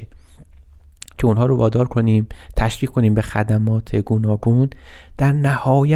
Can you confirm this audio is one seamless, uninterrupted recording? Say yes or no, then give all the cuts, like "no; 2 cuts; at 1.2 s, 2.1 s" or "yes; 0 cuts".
yes; 0 cuts